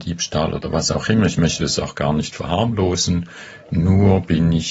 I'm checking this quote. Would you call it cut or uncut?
uncut